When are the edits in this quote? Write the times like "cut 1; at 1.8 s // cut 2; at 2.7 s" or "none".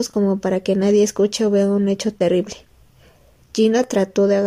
none